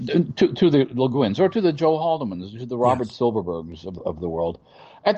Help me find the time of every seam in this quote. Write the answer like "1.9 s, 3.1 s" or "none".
4.0 s